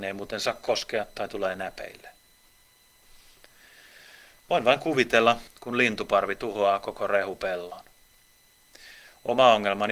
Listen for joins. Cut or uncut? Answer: cut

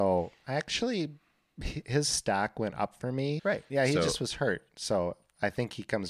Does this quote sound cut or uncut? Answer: cut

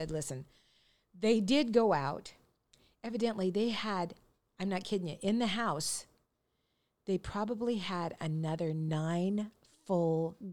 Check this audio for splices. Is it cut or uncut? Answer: uncut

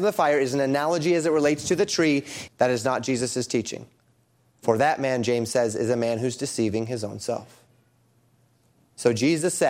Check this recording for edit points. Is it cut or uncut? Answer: cut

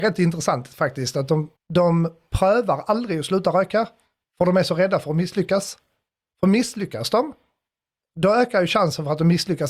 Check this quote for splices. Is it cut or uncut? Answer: cut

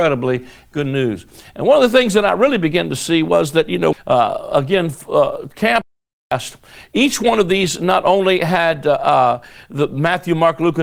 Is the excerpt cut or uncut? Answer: cut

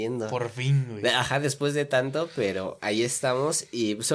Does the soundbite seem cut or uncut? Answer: uncut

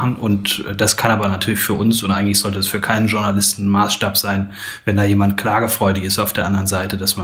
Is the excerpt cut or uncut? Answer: uncut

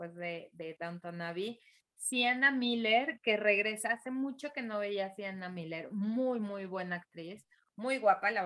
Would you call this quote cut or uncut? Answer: uncut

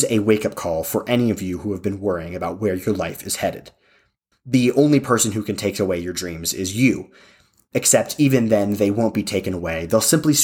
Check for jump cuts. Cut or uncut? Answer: cut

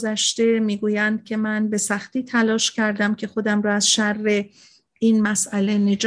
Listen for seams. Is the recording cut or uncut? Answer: uncut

